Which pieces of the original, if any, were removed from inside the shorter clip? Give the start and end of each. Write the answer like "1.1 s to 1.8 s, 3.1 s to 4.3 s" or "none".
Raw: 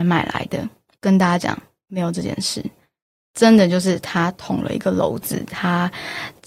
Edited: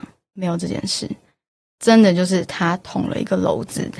none